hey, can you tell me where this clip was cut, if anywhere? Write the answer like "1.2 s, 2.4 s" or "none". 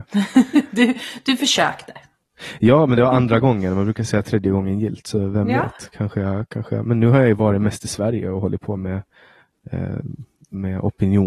none